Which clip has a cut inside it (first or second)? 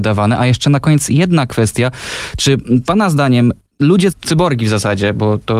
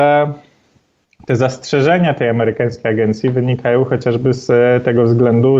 first